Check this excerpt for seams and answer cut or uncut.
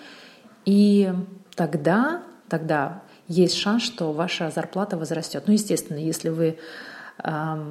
uncut